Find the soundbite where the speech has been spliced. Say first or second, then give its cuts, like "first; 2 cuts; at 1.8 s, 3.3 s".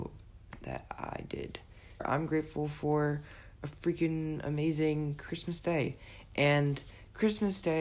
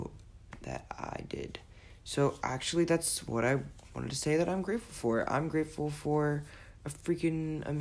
first; 1 cut; at 2.0 s